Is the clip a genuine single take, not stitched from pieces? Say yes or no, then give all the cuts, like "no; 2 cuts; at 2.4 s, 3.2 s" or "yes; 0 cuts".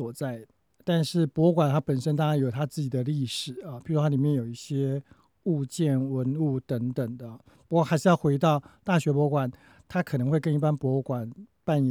yes; 0 cuts